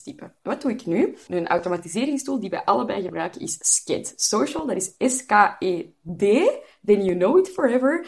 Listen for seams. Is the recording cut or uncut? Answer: cut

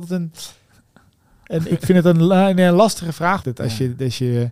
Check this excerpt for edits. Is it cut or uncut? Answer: cut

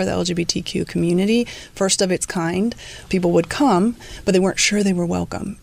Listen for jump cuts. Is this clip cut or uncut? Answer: cut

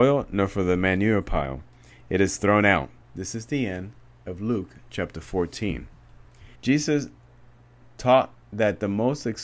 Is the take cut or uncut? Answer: cut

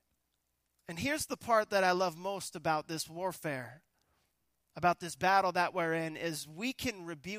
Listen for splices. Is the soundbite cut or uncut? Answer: uncut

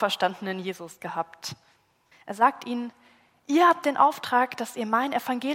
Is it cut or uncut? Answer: cut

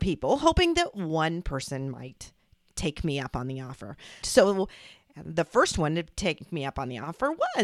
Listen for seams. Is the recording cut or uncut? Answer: cut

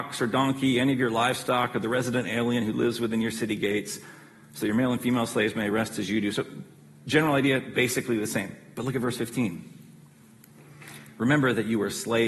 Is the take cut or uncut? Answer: uncut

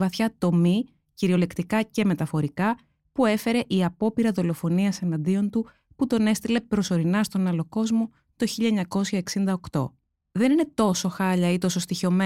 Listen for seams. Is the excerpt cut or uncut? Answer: cut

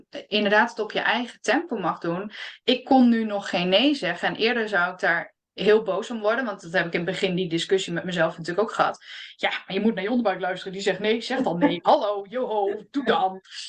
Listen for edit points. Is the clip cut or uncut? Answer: uncut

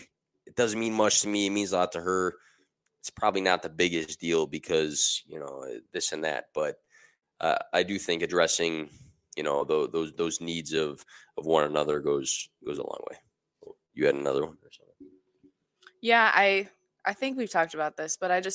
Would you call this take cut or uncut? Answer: uncut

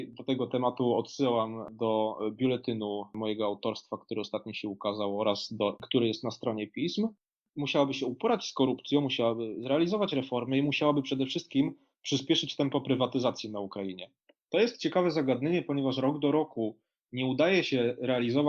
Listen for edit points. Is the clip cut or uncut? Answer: cut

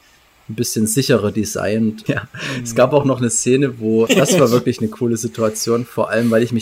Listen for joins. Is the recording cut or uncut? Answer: cut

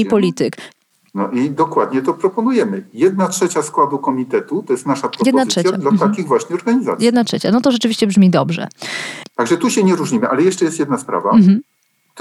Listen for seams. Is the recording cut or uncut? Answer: uncut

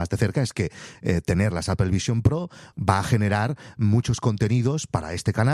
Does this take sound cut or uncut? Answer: uncut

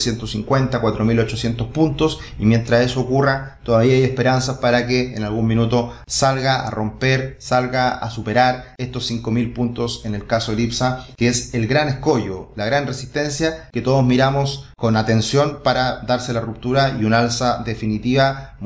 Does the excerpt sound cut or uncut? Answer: uncut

